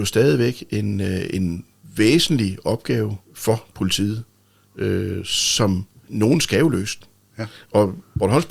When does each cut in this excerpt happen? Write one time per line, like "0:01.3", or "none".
0:03.2
0:06.0